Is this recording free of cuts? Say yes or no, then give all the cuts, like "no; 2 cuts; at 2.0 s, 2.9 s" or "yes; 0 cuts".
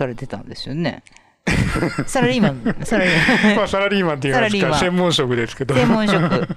yes; 0 cuts